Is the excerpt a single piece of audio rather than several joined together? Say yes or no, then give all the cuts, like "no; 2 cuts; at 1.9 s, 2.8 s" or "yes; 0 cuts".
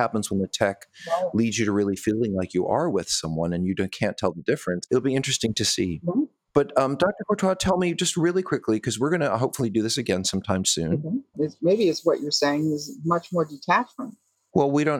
no; 2 cuts; at 4.9 s, 11.3 s